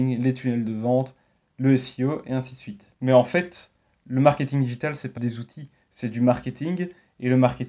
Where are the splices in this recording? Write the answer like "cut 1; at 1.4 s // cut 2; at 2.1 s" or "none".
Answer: cut 1; at 5.2 s